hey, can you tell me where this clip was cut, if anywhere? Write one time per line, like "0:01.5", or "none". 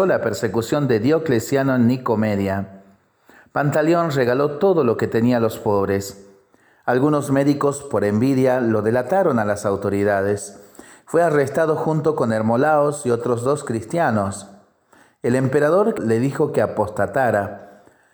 0:16.0